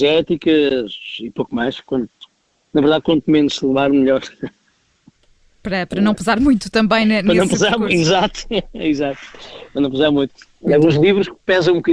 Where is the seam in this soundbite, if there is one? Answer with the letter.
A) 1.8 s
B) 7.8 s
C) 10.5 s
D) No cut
C